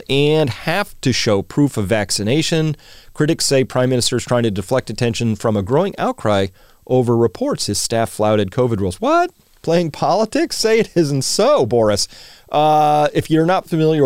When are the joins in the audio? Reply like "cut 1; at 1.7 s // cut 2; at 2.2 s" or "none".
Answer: none